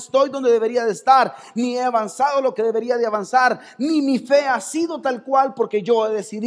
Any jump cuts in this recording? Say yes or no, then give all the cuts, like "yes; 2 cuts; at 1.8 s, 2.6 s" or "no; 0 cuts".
no; 0 cuts